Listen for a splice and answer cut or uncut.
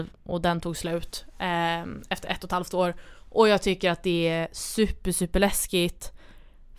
uncut